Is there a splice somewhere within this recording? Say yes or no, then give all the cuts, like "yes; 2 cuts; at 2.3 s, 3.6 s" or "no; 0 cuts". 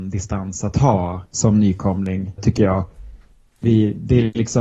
yes; 2 cuts; at 1.3 s, 2.4 s